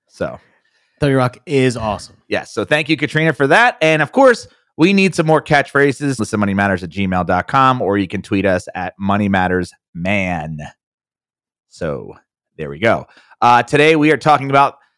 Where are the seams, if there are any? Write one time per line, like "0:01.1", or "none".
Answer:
0:06.2